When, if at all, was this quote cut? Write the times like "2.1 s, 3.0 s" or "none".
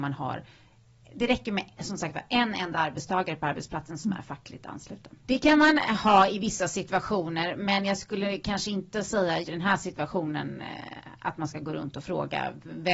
5.2 s, 9.4 s